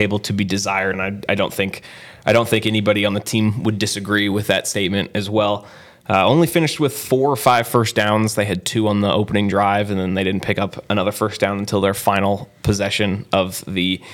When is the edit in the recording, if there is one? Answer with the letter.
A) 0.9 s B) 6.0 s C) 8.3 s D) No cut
A